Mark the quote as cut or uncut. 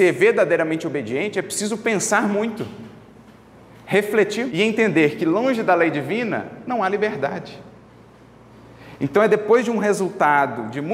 cut